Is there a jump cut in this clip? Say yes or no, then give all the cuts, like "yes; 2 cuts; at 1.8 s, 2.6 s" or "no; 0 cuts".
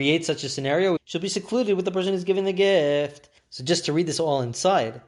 yes; 2 cuts; at 1.0 s, 3.4 s